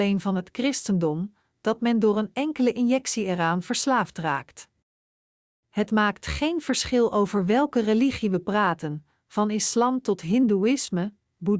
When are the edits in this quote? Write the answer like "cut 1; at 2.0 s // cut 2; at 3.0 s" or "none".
none